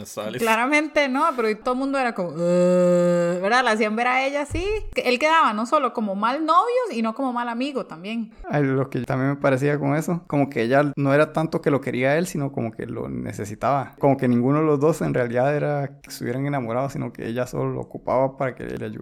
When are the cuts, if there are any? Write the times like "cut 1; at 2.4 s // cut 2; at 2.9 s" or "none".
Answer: none

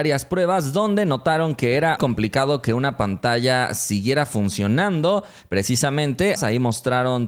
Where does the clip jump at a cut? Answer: cut 1; at 2.0 s // cut 2; at 6.4 s

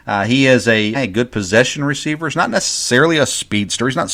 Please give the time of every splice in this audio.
cut 1; at 0.9 s

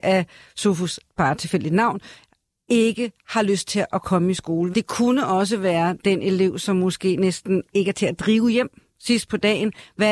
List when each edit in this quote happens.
cut 1; at 1.1 s // cut 2; at 4.7 s

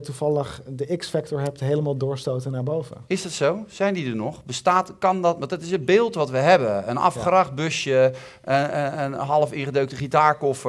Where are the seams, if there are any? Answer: none

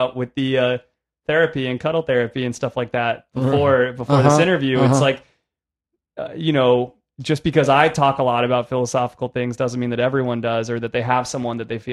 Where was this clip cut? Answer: none

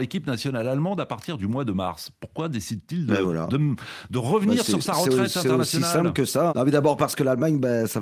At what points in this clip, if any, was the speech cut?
cut 1; at 6.5 s

